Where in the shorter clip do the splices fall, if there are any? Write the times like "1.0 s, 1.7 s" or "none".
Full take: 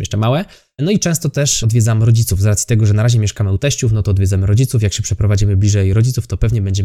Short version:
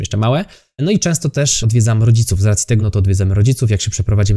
2.8 s